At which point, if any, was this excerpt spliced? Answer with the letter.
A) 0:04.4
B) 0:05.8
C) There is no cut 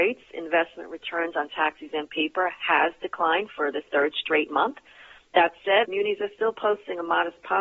B